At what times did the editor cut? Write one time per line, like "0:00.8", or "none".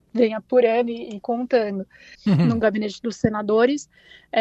0:02.1